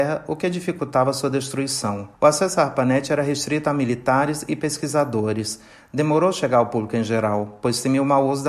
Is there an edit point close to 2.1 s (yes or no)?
yes